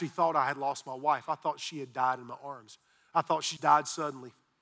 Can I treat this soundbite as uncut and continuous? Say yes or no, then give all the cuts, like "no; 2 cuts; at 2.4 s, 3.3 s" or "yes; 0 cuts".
no; 1 cut; at 3.6 s